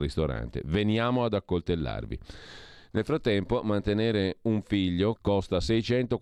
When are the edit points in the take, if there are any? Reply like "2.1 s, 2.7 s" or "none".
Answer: 5.2 s